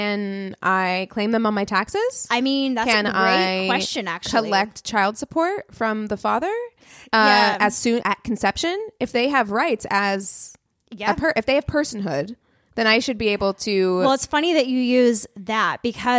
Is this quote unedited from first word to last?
no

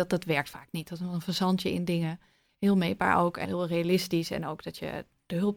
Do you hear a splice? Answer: yes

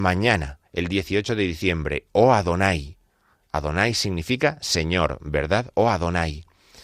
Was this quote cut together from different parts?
no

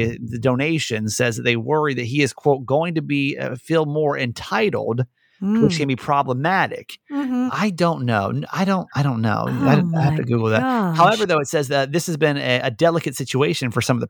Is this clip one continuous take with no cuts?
no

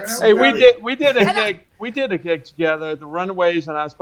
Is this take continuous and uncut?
yes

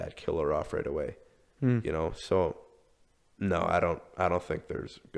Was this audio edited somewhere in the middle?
no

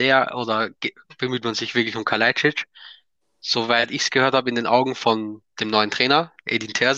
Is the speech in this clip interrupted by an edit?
no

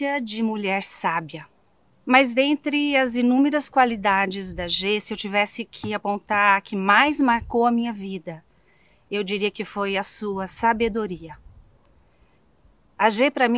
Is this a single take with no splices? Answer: no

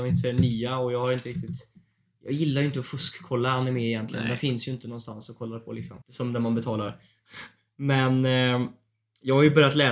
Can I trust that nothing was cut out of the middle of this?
no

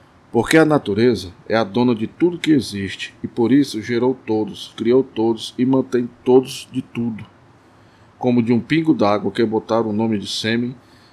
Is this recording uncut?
no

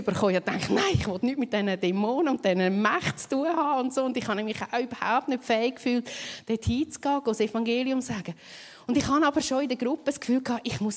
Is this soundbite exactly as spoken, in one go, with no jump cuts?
yes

